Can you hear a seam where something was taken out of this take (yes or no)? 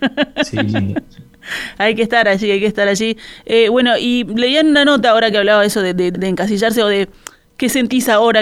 yes